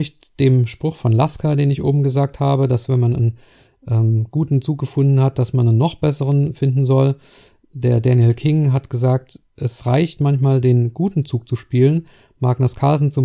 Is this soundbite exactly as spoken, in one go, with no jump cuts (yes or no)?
yes